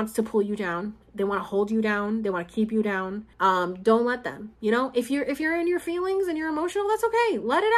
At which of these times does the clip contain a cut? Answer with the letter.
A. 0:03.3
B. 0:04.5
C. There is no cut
A